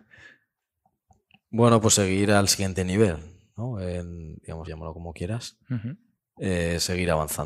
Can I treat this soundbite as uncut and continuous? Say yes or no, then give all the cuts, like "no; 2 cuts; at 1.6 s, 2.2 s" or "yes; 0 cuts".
no; 1 cut; at 4.7 s